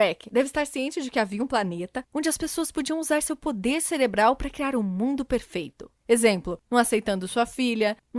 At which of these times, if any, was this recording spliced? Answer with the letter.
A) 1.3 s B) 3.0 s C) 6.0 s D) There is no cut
C